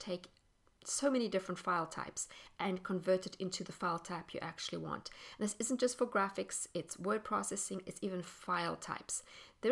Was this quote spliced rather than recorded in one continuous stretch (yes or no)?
no